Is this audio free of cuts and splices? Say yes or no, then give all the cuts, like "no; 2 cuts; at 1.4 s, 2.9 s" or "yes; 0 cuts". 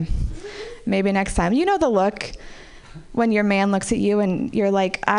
yes; 0 cuts